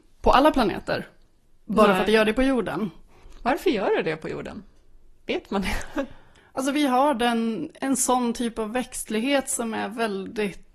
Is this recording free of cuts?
no; 1 cut; at 7.8 s

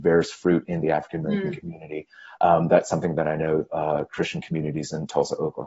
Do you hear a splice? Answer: no; 0 cuts

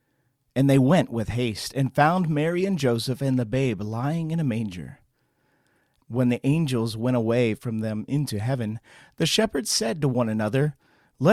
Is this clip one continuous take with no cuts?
no; 1 cut; at 6.0 s

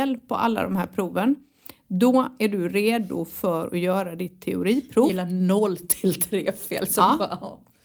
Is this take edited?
no; 0 cuts

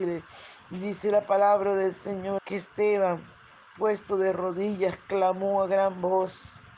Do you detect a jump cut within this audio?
yes; 1 cut; at 2.4 s

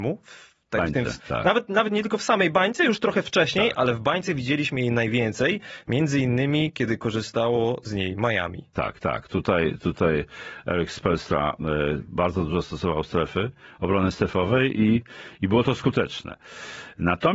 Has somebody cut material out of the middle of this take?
yes; 1 cut; at 1.2 s

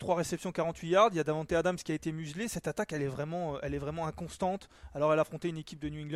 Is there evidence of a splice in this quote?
no; 0 cuts

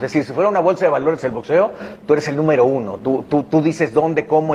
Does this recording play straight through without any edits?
yes; 0 cuts

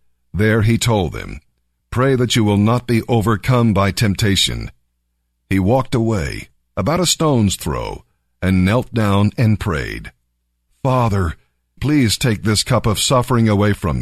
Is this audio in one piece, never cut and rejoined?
no; 1 cut; at 11.8 s

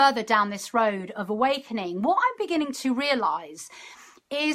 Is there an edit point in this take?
no; 0 cuts

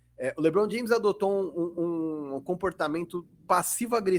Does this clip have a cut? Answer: no; 0 cuts

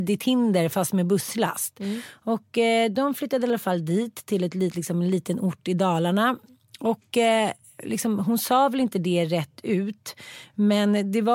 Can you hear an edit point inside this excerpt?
no; 0 cuts

